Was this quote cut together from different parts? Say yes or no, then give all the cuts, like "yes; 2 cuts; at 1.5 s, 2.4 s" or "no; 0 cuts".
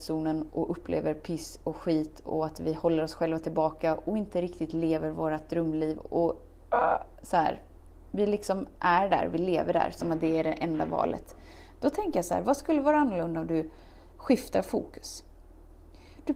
no; 0 cuts